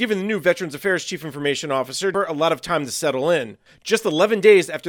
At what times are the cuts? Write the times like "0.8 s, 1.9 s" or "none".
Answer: 2.1 s